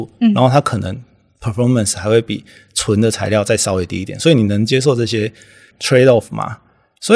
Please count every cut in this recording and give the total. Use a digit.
0